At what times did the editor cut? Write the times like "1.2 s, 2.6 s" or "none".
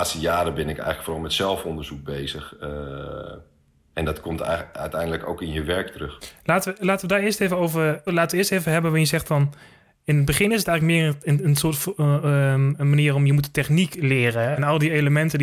8.1 s, 14.5 s